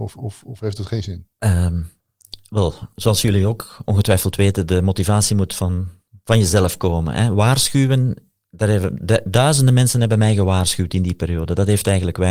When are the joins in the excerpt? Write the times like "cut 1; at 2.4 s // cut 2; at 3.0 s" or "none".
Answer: none